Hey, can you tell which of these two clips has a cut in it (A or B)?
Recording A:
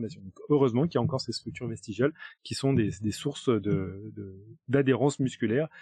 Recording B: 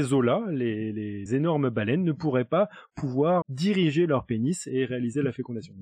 B